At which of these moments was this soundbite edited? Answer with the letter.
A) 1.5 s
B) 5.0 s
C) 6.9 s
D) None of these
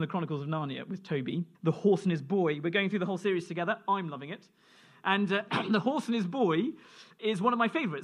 A